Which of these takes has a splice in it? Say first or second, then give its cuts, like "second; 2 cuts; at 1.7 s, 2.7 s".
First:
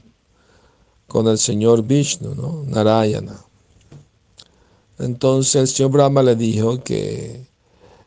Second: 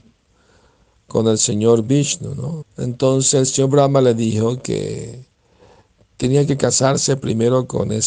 second; 1 cut; at 2.6 s